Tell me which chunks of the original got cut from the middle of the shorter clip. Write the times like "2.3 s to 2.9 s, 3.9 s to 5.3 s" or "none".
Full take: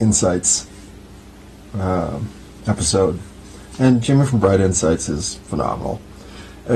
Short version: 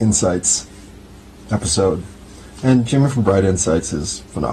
1.4 s to 2.5 s